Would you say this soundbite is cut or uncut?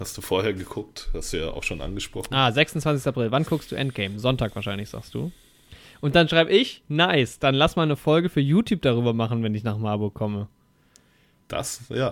uncut